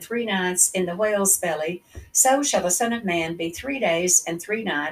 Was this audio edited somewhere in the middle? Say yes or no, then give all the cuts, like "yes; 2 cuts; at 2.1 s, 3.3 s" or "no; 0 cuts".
no; 0 cuts